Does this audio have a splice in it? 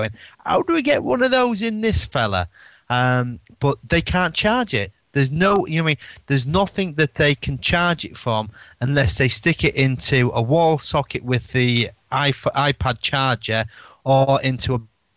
no; 0 cuts

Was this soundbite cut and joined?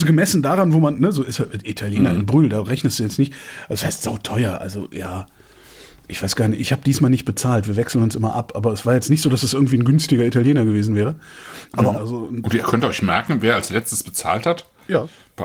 yes; 1 cut; at 11.9 s

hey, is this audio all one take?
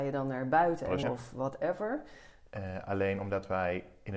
no; 2 cuts; at 1.0 s, 2.5 s

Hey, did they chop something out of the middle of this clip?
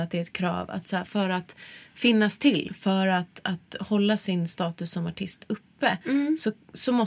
no; 0 cuts

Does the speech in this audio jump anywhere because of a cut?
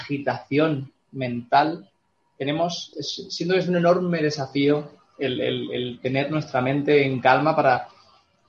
yes; 1 cut; at 2.9 s

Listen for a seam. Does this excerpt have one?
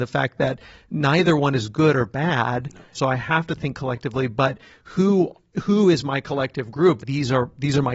yes; 2 cuts; at 2.9 s, 7.0 s

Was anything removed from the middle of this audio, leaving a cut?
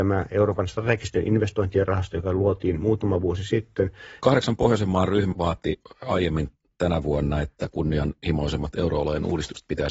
yes; 2 cuts; at 4.2 s, 5.3 s

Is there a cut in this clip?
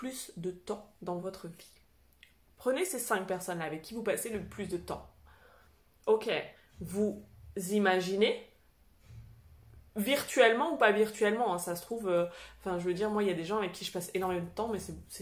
no; 0 cuts

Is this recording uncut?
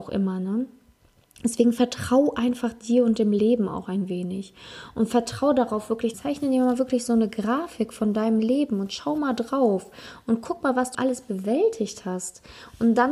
no; 2 cuts; at 6.1 s, 10.9 s

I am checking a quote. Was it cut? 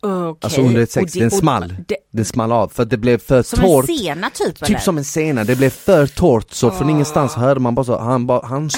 no; 0 cuts

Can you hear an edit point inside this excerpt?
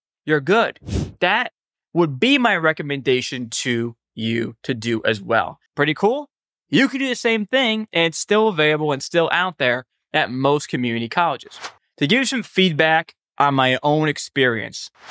yes; 1 cut; at 5.7 s

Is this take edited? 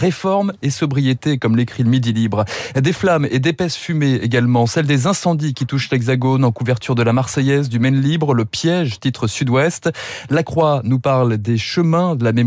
no; 0 cuts

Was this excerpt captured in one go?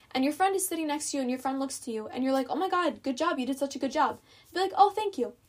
yes; 0 cuts

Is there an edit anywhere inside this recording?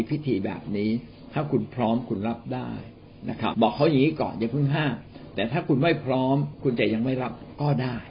yes; 1 cut; at 3.5 s

